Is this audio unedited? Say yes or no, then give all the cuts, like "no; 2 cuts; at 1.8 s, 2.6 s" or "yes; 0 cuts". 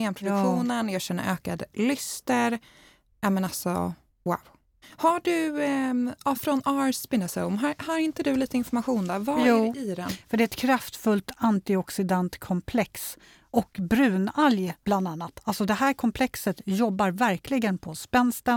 yes; 0 cuts